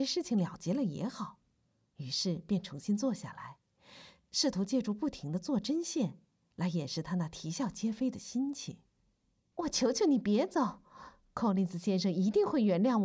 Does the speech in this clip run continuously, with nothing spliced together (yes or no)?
no